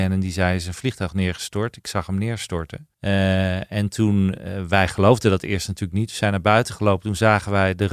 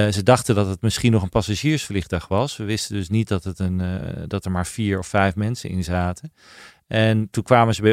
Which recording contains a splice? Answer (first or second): first